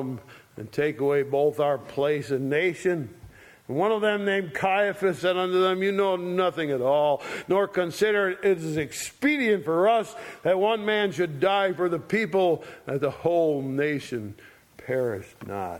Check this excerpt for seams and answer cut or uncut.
cut